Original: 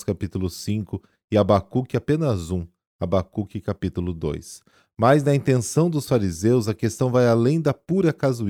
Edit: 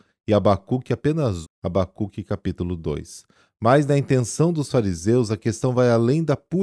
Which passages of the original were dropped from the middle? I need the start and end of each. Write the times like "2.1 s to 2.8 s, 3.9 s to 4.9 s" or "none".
2.5 s to 2.8 s